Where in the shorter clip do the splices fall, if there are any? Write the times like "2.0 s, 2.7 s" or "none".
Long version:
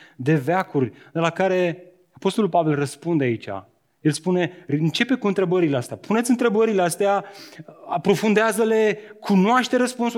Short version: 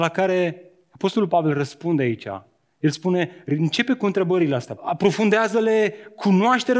4.8 s